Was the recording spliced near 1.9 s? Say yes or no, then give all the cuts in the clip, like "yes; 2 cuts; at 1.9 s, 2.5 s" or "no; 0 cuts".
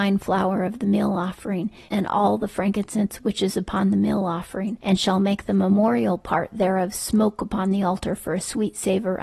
yes; 1 cut; at 1.9 s